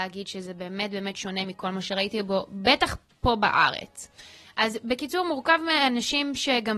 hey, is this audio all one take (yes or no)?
yes